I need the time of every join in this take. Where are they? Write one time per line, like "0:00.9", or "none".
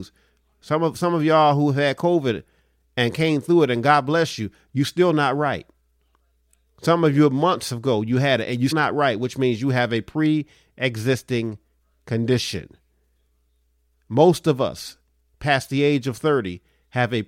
0:08.7